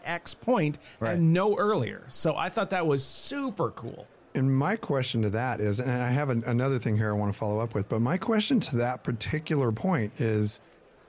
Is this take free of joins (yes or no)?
yes